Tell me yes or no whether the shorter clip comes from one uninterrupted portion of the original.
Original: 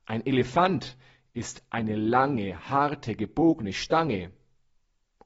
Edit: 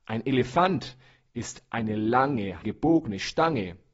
no